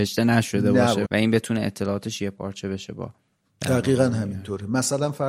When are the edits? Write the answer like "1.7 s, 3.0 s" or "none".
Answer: 1.0 s